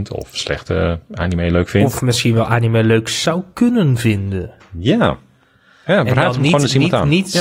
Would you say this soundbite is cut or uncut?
uncut